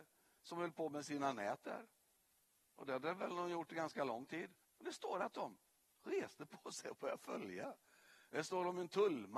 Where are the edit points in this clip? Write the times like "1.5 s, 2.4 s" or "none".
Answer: 4.6 s